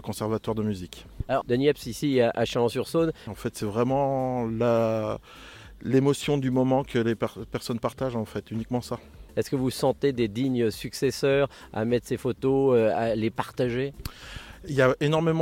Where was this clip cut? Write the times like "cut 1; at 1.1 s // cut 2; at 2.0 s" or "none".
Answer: cut 1; at 1.4 s // cut 2; at 3.3 s // cut 3; at 9.3 s

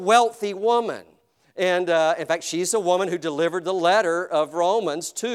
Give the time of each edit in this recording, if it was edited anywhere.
none

